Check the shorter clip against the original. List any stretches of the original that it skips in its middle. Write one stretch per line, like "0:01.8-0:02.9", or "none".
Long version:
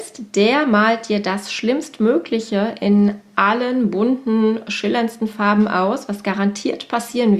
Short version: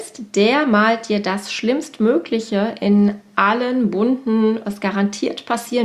0:04.6-0:06.1